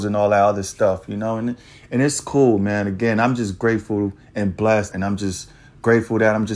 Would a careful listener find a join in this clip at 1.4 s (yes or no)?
no